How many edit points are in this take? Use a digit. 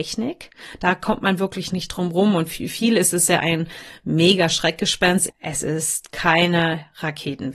1